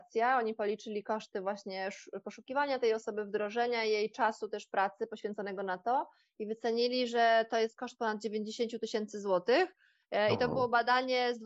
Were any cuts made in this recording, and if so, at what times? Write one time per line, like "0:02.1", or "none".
none